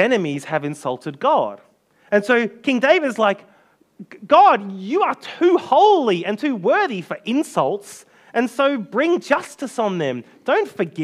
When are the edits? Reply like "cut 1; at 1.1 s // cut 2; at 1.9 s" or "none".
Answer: none